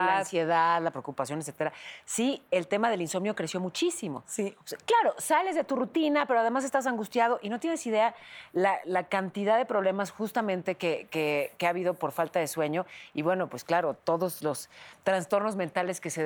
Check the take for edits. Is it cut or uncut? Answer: uncut